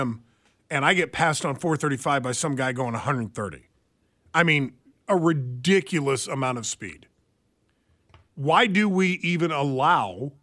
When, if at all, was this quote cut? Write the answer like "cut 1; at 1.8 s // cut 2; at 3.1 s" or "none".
none